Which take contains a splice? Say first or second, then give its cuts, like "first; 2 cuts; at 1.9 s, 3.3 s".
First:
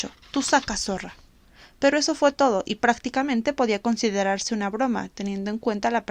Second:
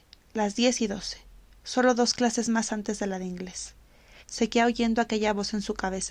second; 1 cut; at 4.2 s